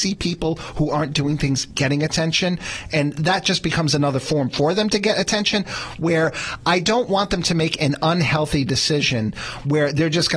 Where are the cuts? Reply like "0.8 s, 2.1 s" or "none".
none